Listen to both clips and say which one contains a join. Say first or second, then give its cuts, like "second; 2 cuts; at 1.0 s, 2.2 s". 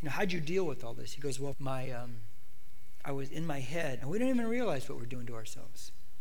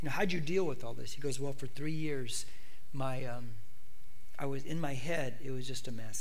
first; 2 cuts; at 1.5 s, 4.0 s